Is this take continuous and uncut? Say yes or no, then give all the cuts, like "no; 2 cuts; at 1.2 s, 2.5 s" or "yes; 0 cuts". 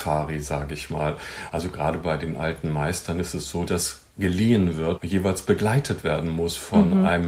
no; 2 cuts; at 3.7 s, 5.0 s